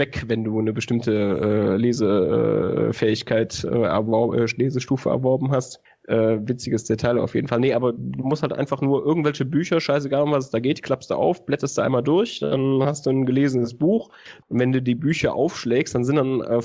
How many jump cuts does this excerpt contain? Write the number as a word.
one